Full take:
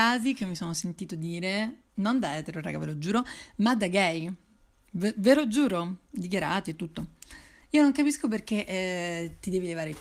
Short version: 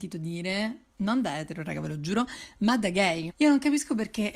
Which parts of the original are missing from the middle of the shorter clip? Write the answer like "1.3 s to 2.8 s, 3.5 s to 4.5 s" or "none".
4.3 s to 7.6 s